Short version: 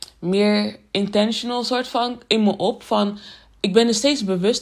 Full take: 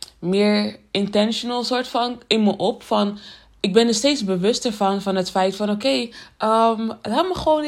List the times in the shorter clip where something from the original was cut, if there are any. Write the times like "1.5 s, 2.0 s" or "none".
none